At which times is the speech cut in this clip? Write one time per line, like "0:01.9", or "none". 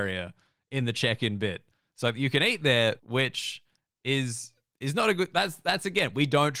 0:03.0